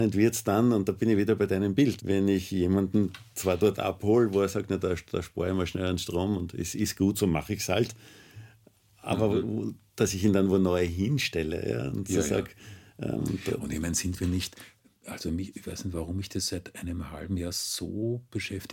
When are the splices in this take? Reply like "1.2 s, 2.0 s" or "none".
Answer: 2.0 s